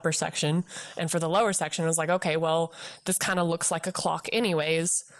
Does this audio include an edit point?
no; 0 cuts

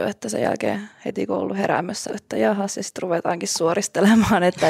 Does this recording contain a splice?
yes; 1 cut; at 2.1 s

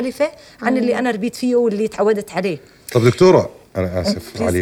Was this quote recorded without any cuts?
no; 1 cut; at 3.7 s

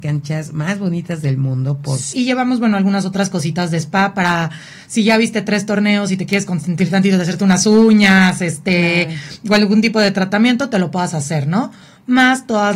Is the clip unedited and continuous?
no; 1 cut; at 2.1 s

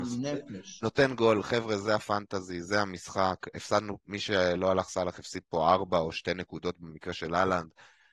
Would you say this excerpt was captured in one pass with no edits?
yes; 0 cuts

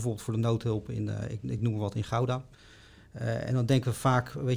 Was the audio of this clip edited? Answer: no; 0 cuts

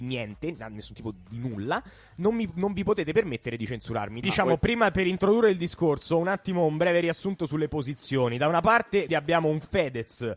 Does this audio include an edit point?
yes; 2 cuts; at 4.2 s, 9.1 s

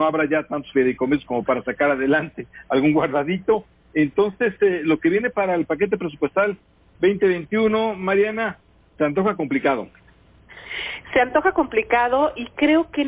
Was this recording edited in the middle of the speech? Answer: no; 0 cuts

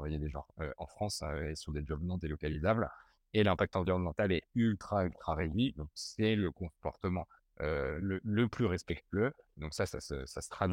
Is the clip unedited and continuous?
no; 1 cut; at 9.5 s

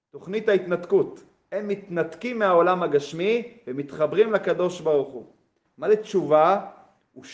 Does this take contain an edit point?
yes; 1 cut; at 5.6 s

